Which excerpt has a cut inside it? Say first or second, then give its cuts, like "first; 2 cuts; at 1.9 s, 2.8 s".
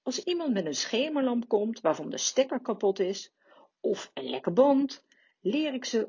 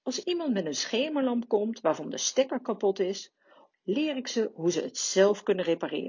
second; 1 cut; at 3.7 s